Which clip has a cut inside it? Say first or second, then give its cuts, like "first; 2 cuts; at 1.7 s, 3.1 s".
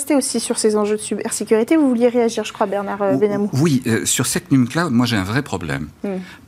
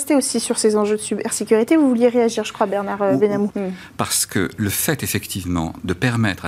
second; 1 cut; at 3.5 s